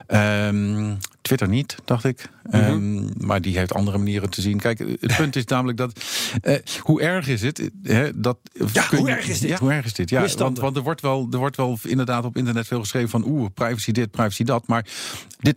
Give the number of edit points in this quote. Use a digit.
1